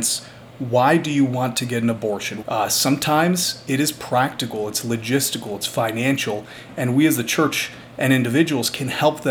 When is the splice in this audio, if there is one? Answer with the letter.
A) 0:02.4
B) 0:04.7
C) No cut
A